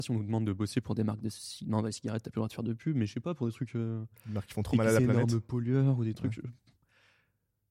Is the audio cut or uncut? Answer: uncut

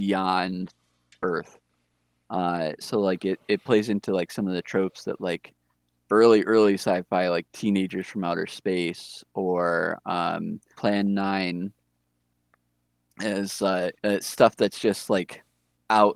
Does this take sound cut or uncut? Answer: cut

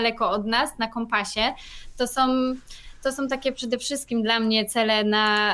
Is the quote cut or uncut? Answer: uncut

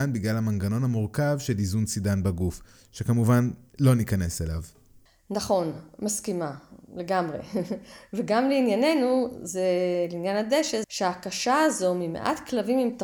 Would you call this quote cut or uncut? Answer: cut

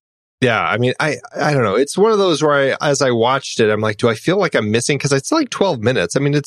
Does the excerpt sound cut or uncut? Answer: uncut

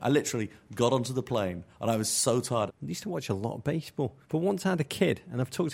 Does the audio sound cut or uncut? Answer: cut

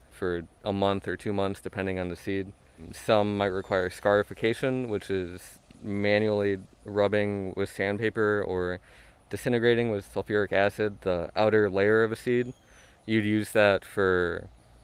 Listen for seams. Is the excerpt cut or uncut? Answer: uncut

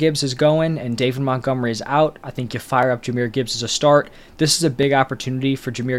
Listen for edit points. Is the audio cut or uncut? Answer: uncut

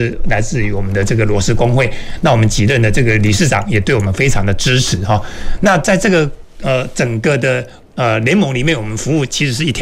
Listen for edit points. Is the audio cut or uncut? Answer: uncut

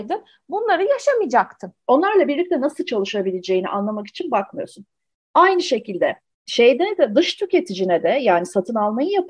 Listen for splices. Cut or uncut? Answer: cut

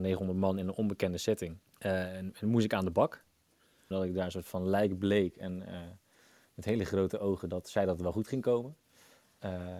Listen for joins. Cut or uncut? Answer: cut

